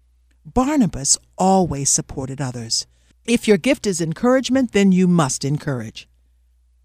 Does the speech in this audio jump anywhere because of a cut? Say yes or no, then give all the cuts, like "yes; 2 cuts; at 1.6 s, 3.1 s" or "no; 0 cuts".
yes; 1 cut; at 3.1 s